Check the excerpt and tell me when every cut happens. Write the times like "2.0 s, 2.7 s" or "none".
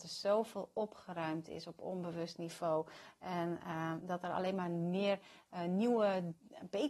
none